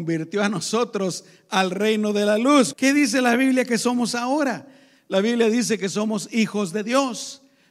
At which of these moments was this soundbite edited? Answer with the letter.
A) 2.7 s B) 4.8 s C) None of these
A